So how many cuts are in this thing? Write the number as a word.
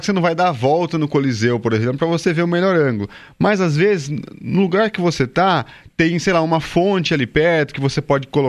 zero